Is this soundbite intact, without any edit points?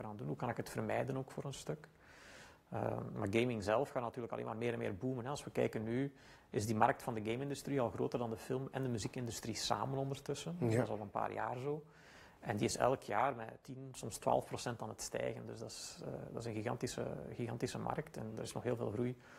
yes; 0 cuts

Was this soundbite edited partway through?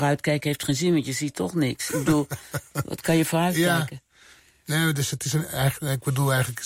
no; 0 cuts

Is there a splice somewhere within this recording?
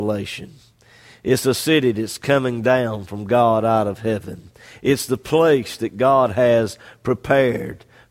no; 0 cuts

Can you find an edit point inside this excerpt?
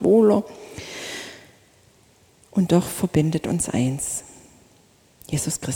no; 0 cuts

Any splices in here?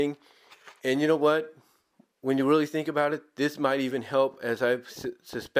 no; 0 cuts

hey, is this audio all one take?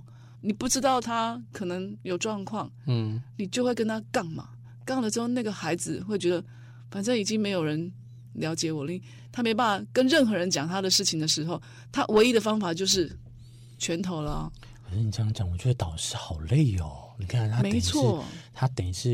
yes; 0 cuts

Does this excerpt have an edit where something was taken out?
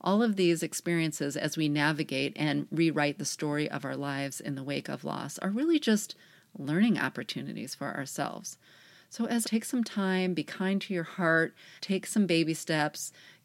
yes; 2 cuts; at 9.4 s, 11.8 s

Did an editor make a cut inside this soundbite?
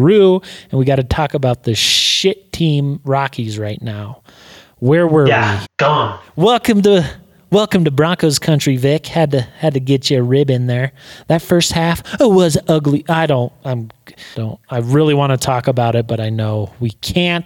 yes; 2 cuts; at 5.6 s, 14.3 s

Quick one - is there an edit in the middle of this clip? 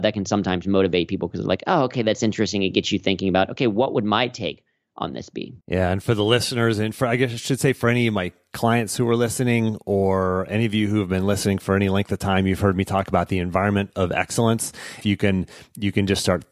yes; 2 cuts; at 5.6 s, 15.0 s

